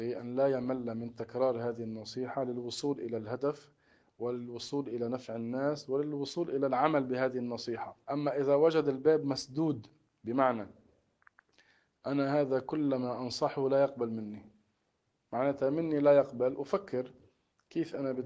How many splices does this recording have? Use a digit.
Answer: 1